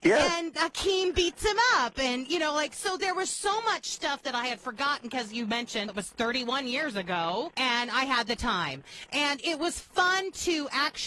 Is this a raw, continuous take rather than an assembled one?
no; 2 cuts; at 5.9 s, 7.5 s

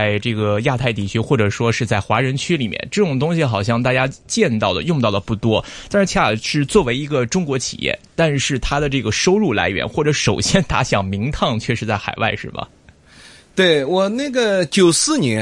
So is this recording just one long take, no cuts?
no; 1 cut; at 6.1 s

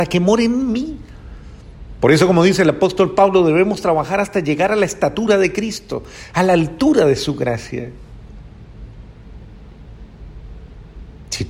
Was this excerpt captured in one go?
yes; 0 cuts

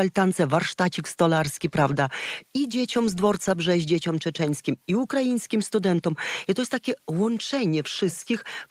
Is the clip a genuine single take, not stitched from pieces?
yes; 0 cuts

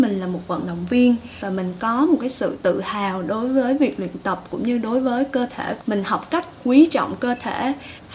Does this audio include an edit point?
yes; 1 cut; at 5.8 s

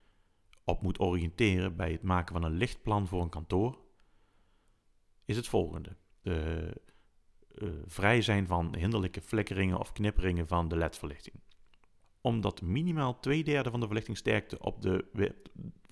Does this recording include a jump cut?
yes; 2 cuts; at 6.2 s, 12.0 s

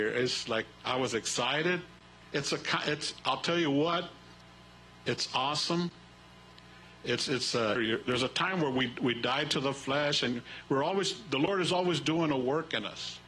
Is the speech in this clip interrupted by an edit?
yes; 2 cuts; at 2.2 s, 7.8 s

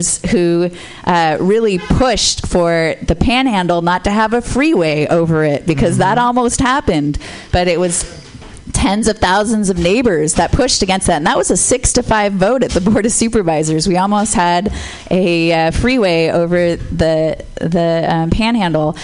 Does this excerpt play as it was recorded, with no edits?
yes; 0 cuts

